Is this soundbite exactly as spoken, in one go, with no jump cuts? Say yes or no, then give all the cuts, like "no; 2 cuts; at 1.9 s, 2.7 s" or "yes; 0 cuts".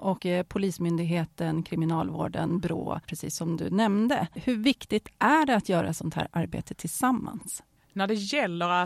yes; 0 cuts